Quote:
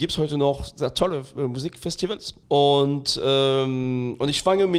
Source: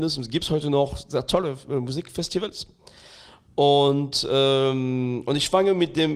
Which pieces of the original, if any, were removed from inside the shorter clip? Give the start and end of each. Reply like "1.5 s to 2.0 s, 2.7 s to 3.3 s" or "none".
2.8 s to 3.5 s